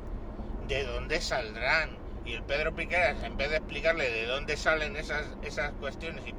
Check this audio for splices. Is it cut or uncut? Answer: uncut